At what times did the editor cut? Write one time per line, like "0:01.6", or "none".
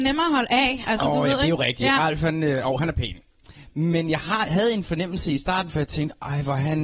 none